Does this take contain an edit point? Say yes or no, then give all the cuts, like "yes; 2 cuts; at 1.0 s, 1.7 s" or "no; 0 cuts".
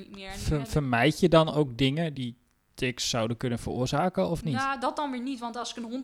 yes; 1 cut; at 2.1 s